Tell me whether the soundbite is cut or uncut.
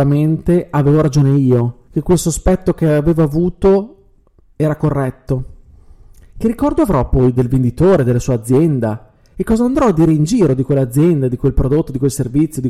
cut